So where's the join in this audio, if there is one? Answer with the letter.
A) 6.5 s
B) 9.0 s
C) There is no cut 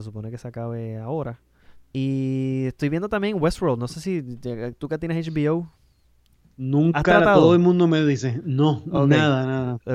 C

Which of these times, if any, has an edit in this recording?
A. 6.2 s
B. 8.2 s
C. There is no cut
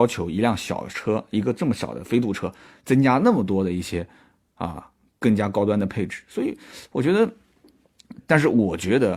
B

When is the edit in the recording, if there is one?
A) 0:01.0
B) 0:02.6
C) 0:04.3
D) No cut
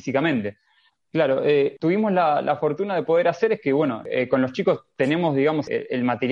A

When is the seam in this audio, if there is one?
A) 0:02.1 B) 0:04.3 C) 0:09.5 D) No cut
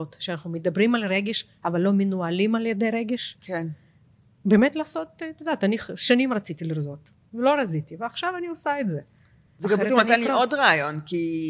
C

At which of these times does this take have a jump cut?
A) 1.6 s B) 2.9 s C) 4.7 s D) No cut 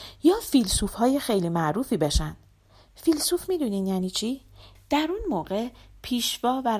C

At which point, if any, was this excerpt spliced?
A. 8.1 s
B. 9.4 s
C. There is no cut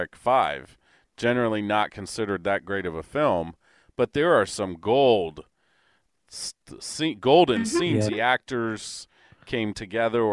A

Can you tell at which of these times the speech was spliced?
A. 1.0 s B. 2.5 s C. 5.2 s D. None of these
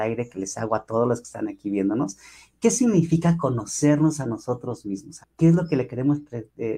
C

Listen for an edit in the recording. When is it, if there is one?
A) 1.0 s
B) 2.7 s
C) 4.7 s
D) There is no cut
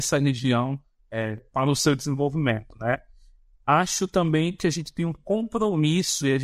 D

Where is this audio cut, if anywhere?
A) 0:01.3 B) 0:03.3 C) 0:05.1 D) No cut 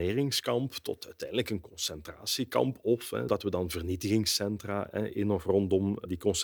B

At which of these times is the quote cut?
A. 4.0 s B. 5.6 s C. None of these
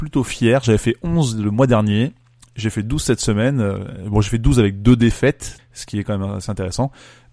B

